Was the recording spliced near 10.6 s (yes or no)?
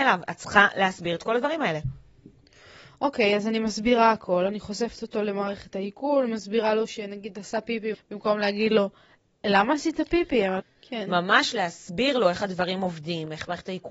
yes